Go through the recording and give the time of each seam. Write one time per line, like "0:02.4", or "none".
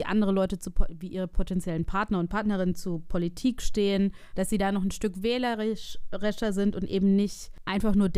0:04.3